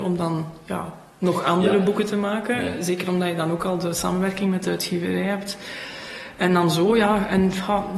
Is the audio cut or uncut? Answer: uncut